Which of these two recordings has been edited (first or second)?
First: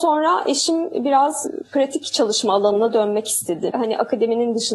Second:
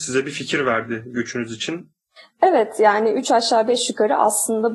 first